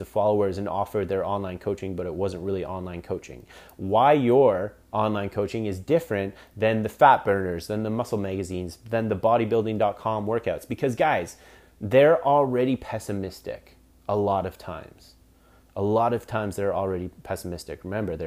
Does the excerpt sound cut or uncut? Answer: uncut